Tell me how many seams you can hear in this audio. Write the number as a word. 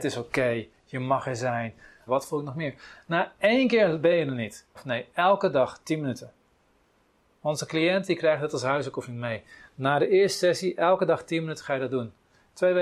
two